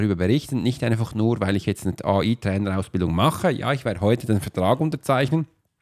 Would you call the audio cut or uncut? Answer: uncut